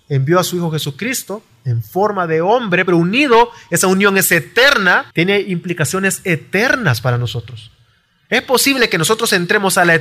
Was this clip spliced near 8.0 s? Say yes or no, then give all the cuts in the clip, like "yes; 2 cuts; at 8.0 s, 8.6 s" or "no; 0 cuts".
no; 2 cuts; at 2.9 s, 5.1 s